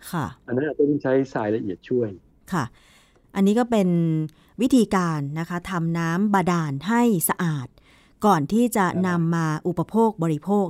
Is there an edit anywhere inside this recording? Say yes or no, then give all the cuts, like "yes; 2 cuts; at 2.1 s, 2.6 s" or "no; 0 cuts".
no; 0 cuts